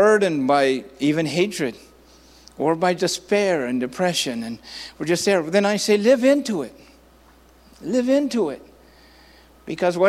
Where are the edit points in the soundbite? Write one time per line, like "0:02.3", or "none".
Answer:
0:03.0